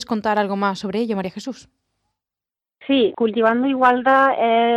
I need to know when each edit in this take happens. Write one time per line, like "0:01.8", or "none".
0:03.1

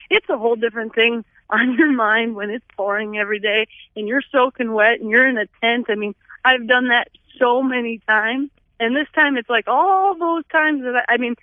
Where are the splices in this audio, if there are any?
none

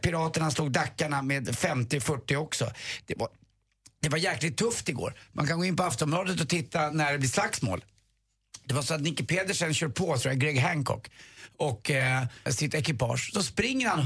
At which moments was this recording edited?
0:12.5

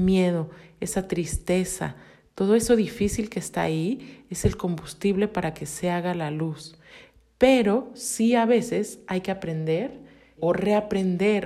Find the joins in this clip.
0:10.4

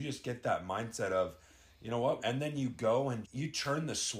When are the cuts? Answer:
0:02.2
0:03.2

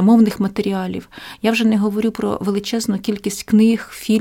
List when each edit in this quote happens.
none

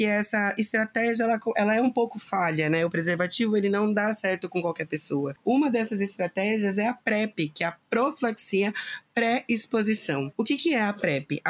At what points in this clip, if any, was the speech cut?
0:05.4

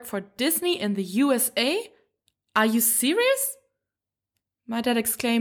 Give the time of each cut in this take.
none

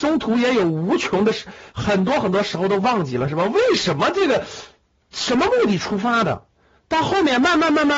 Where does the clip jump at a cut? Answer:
none

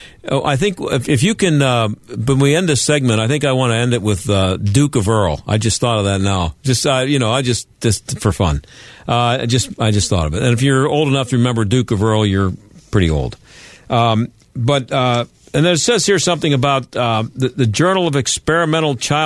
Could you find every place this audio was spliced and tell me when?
none

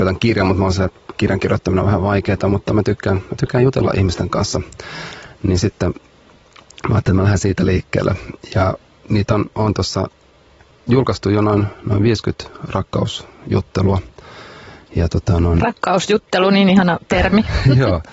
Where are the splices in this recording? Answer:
none

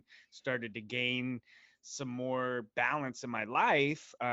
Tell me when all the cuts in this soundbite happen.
none

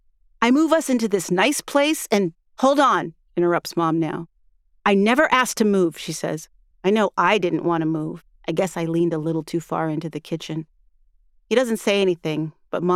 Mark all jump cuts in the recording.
0:06.7
0:08.4

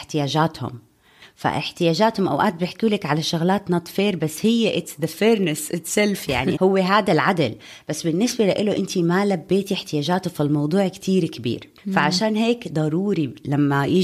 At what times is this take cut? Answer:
0:06.6
0:11.8

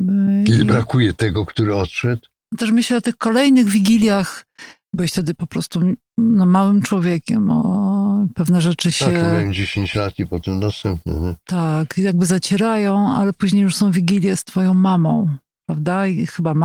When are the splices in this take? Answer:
0:02.4

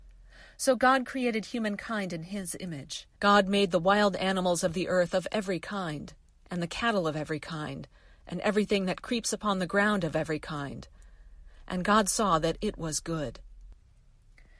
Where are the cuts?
0:03.2

